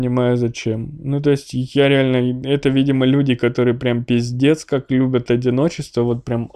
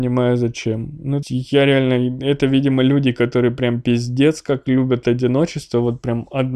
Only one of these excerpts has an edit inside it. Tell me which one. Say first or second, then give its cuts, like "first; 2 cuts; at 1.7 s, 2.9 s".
second; 1 cut; at 1.2 s